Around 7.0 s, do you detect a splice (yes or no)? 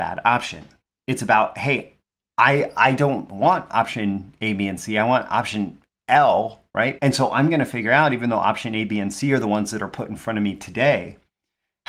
yes